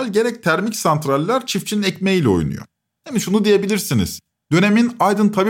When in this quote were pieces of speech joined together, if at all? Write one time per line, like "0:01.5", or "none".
0:04.3